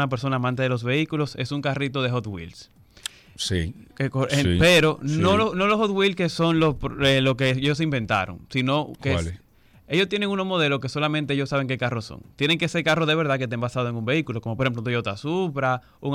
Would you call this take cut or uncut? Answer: uncut